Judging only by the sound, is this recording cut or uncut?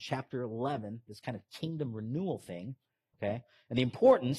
cut